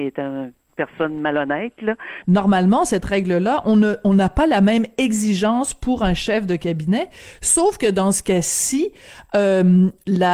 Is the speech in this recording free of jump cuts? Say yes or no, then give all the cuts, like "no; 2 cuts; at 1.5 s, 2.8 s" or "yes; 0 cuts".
no; 1 cut; at 2.2 s